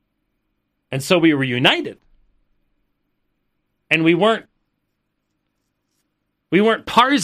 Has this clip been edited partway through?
no; 0 cuts

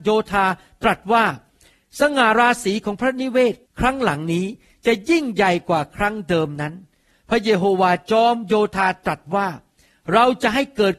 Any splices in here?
no; 0 cuts

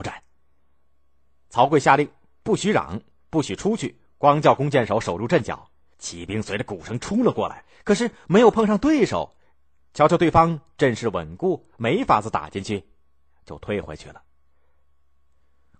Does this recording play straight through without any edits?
yes; 0 cuts

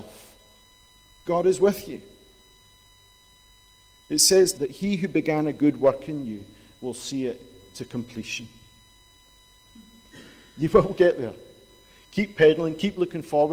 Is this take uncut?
no; 2 cuts; at 4.5 s, 9.6 s

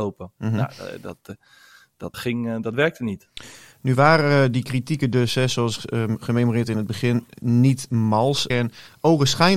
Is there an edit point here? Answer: yes; 2 cuts; at 2.1 s, 8.5 s

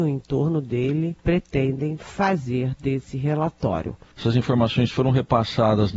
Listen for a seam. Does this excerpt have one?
yes; 2 cuts; at 1.2 s, 4.1 s

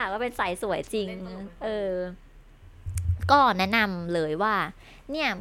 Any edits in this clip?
no; 0 cuts

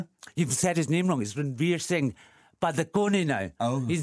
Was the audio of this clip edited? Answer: no; 0 cuts

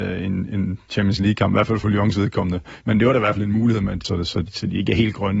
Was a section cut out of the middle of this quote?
yes; 2 cuts; at 2.8 s, 4.0 s

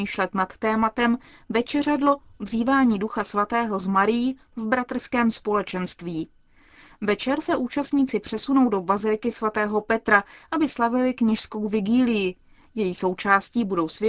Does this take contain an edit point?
no; 0 cuts

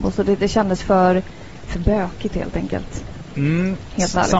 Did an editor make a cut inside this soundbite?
no; 0 cuts

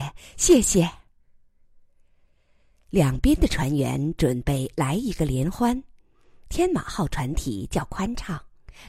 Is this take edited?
no; 0 cuts

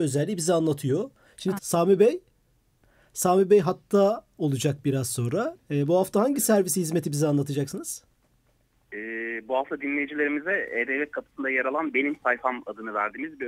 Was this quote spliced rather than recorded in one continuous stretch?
yes; 2 cuts; at 1.6 s, 5.6 s

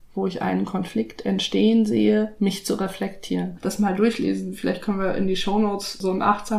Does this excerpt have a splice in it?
yes; 1 cut; at 3.6 s

